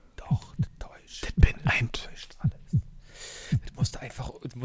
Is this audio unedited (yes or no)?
yes